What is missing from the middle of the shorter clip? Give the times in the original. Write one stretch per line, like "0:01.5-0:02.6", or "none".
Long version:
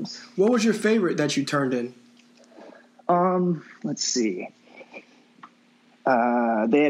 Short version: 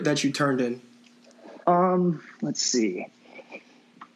0:02.7-0:03.0